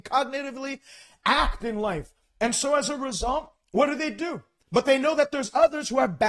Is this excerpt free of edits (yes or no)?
yes